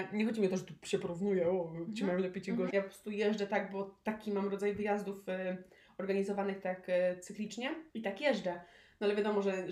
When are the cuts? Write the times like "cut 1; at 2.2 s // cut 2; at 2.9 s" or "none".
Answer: cut 1; at 2.7 s // cut 2; at 7.9 s